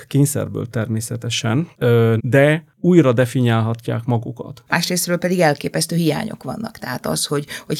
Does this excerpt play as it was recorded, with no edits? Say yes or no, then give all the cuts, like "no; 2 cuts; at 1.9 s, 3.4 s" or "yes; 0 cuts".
no; 2 cuts; at 2.2 s, 4.7 s